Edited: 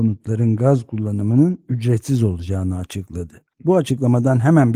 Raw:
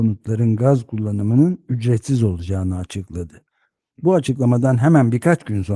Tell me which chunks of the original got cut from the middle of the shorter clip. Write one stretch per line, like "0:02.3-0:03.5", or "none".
0:03.5-0:03.9